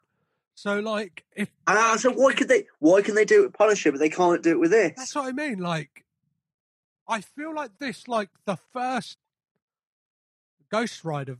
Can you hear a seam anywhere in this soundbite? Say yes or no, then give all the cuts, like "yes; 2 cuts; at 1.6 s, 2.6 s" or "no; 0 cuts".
no; 0 cuts